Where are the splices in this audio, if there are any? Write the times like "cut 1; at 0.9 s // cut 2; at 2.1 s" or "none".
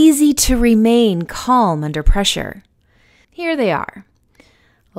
cut 1; at 3.2 s